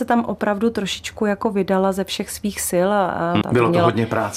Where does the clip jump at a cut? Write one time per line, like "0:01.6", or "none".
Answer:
0:03.4